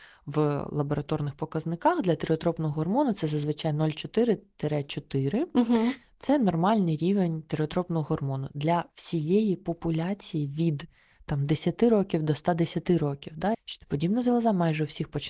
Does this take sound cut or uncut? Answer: cut